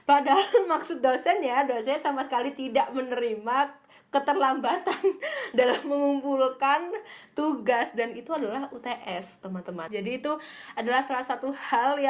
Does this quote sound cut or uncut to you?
cut